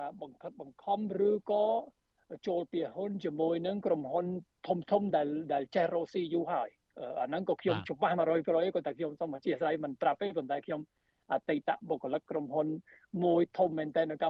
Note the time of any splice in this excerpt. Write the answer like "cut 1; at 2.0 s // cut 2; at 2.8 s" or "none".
none